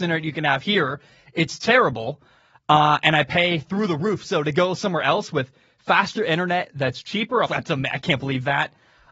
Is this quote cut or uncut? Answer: cut